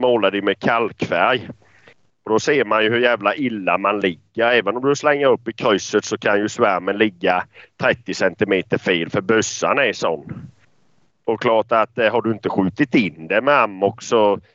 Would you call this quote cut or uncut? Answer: uncut